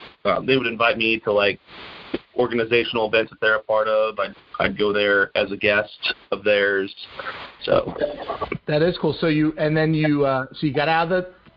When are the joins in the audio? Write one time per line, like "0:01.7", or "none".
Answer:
0:07.6